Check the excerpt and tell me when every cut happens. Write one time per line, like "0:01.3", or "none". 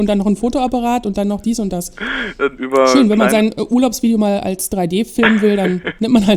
0:02.6